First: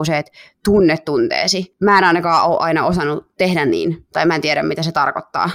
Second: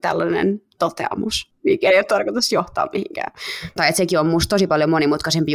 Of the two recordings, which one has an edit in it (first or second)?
second